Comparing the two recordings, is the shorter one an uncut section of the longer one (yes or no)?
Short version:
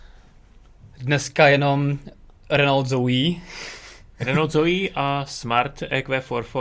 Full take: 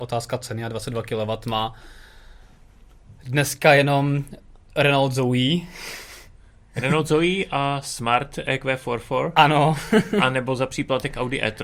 no